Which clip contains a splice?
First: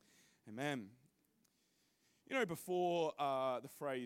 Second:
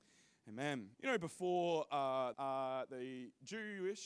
second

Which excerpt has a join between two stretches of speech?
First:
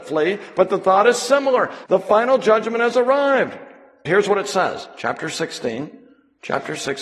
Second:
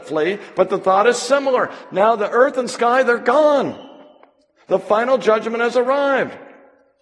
first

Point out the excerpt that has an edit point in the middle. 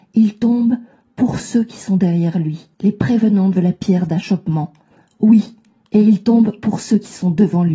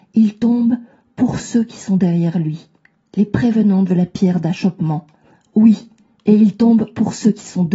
first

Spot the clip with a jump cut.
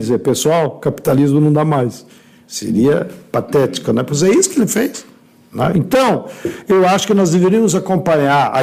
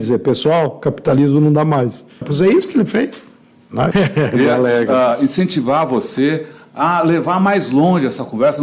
second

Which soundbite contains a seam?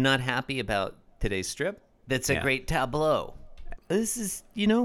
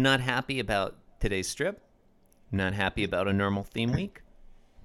first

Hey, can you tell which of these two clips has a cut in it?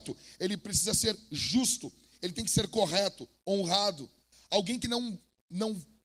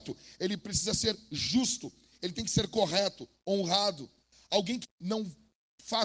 second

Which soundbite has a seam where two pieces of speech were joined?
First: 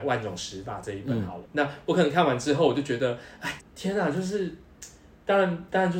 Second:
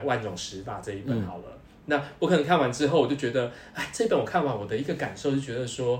first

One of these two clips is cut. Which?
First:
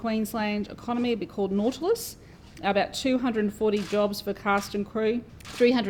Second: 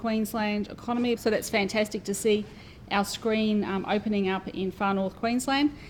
second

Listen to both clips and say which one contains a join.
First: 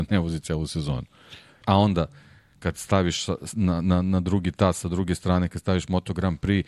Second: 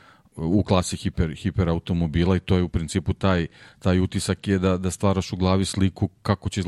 first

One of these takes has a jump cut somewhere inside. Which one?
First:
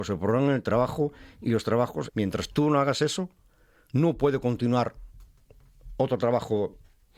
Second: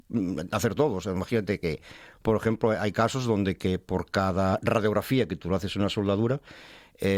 first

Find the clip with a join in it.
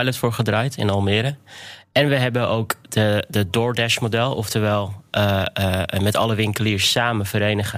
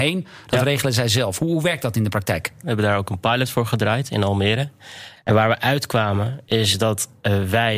second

